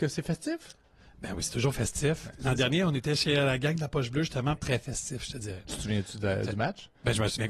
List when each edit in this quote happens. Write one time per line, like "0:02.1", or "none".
0:04.6